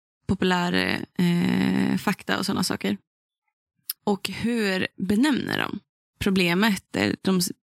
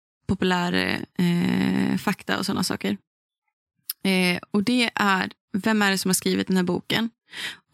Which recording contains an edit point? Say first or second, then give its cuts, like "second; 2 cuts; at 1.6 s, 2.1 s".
first; 1 cut; at 4.0 s